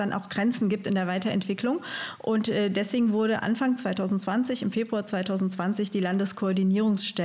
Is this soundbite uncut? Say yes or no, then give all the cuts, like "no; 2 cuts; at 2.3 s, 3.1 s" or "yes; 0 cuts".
yes; 0 cuts